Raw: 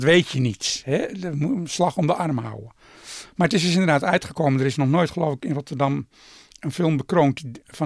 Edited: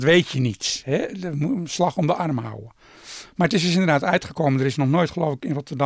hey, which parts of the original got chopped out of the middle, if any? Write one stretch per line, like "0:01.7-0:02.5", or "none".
none